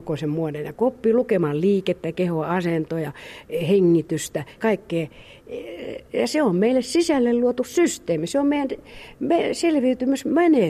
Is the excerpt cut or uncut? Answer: cut